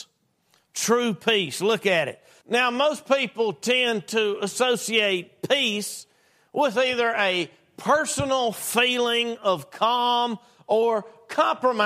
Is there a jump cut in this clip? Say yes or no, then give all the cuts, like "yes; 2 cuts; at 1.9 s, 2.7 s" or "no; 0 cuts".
yes; 1 cut; at 2.4 s